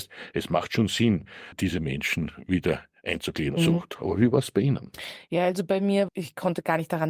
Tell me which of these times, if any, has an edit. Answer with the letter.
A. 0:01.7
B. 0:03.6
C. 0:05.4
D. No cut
B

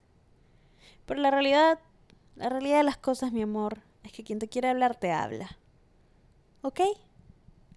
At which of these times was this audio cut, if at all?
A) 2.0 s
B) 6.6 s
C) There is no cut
C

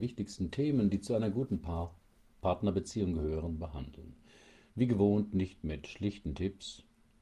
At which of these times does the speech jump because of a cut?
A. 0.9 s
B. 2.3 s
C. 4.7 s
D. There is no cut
C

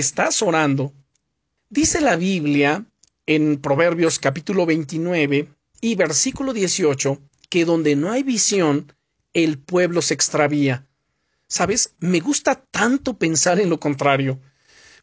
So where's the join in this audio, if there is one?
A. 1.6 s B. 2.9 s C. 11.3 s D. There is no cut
A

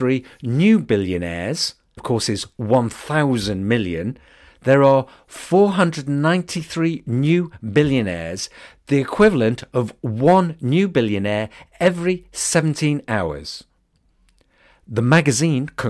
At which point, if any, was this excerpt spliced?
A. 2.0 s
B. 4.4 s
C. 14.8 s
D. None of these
A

